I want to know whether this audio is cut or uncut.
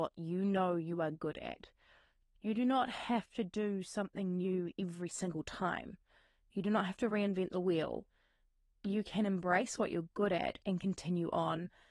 uncut